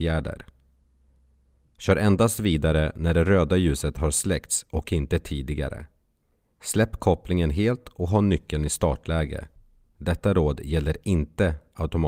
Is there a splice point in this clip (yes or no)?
yes